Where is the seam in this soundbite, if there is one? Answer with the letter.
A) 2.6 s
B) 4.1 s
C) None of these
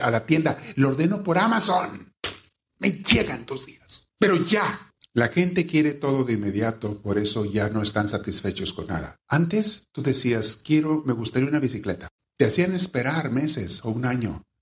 C